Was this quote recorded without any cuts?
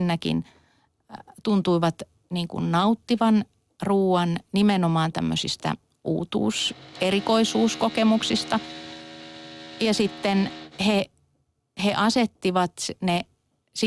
yes; 0 cuts

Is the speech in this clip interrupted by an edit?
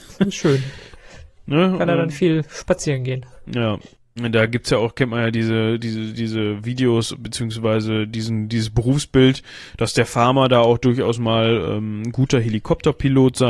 no; 0 cuts

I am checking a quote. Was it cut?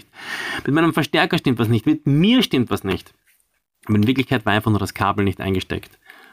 no; 0 cuts

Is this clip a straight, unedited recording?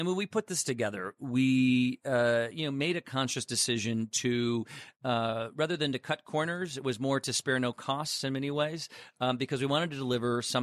yes; 0 cuts

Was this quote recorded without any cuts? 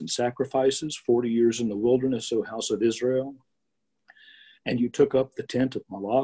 yes; 0 cuts

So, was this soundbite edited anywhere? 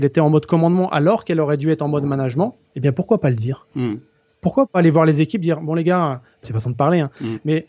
yes; 2 cuts; at 2.7 s, 6.4 s

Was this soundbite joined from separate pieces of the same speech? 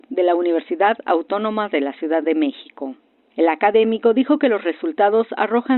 no; 0 cuts

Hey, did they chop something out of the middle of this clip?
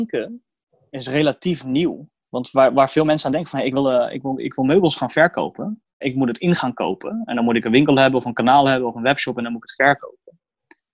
yes; 1 cut; at 6.0 s

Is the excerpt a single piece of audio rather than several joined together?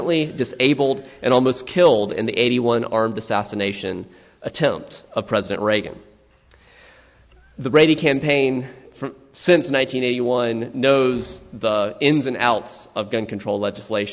yes; 0 cuts

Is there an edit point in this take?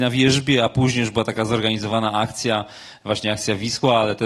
no; 0 cuts

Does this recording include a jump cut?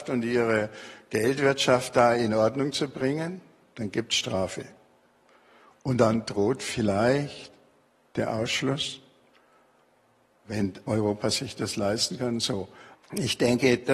yes; 1 cut; at 12.9 s

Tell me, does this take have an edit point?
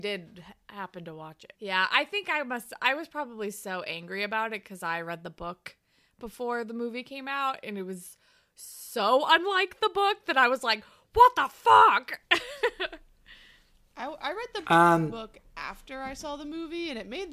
yes; 1 cut; at 1.6 s

